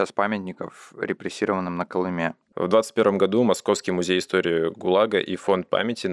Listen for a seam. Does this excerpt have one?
yes; 1 cut; at 2.5 s

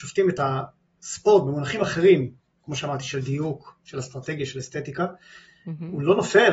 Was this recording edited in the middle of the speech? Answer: no; 0 cuts

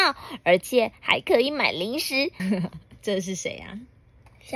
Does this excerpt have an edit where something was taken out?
yes; 1 cut; at 2.4 s

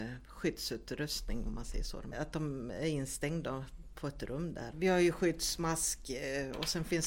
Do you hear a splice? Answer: yes; 2 cuts; at 2.1 s, 4.7 s

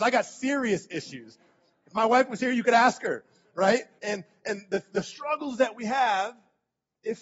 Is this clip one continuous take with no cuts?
no; 1 cut; at 4.0 s

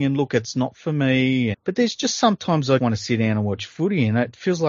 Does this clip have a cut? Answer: yes; 2 cuts; at 1.5 s, 2.8 s

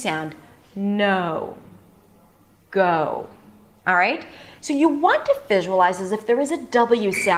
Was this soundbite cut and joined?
no; 0 cuts

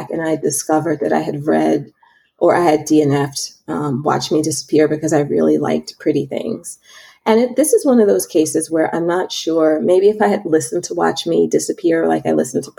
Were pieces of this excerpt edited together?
no; 0 cuts

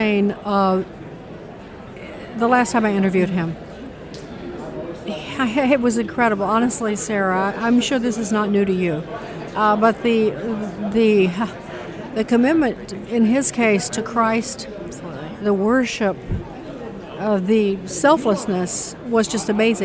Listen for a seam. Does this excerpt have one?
no; 0 cuts

